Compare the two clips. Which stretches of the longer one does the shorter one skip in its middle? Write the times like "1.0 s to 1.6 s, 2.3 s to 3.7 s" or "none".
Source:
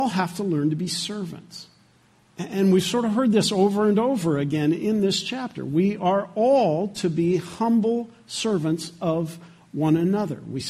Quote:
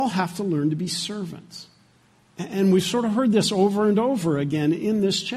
none